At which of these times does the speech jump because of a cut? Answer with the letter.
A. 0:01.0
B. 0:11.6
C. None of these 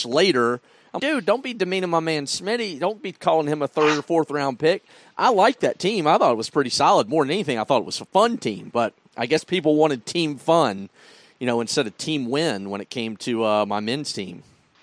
A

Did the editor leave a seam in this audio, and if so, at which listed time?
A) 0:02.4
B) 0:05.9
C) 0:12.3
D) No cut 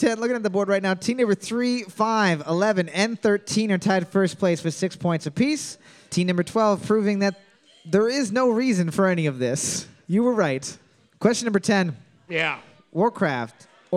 C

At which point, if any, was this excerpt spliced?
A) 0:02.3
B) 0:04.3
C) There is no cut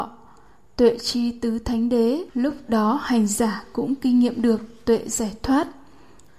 A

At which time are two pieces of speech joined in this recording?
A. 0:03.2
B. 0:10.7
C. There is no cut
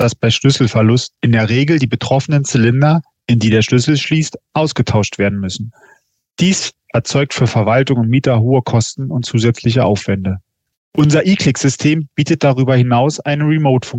B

